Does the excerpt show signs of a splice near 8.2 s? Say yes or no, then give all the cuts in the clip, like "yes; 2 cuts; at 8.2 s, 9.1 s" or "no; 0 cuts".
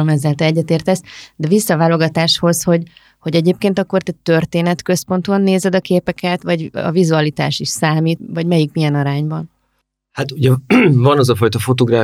yes; 1 cut; at 8.2 s